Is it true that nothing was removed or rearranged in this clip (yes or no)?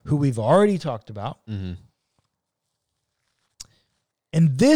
yes